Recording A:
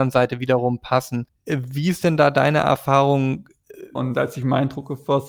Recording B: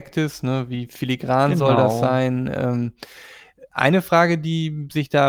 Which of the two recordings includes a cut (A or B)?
A